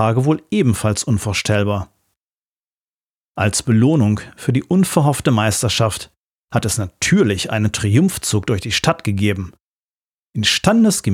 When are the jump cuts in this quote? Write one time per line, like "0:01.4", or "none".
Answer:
none